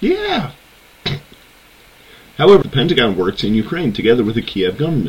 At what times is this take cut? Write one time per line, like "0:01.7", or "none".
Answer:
0:02.6